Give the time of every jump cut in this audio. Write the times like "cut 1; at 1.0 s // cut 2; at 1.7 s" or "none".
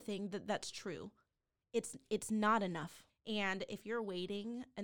cut 1; at 3.1 s